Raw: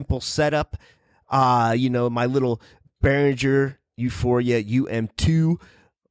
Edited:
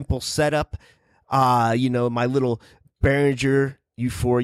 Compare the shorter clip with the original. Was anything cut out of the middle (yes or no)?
no